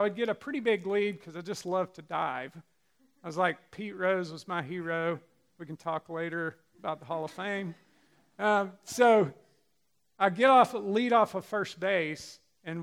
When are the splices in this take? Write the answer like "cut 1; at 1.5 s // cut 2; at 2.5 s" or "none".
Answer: none